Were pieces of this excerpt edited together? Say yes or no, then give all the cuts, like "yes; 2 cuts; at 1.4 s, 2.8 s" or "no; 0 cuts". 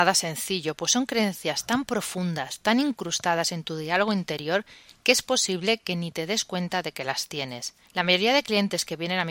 yes; 1 cut; at 7.8 s